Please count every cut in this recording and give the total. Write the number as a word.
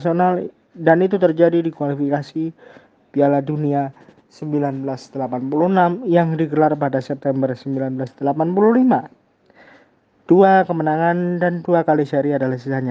one